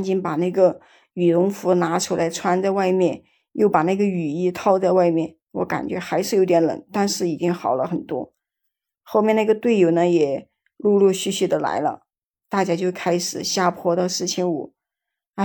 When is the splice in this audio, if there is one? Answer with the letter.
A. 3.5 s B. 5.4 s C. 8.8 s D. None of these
D